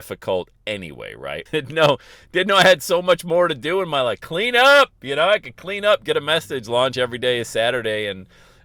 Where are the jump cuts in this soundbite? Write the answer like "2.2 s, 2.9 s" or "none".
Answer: 1.5 s